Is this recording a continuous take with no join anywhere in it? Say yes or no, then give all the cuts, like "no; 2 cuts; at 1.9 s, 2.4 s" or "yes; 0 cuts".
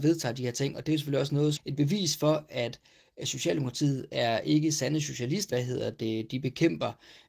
no; 2 cuts; at 1.6 s, 5.5 s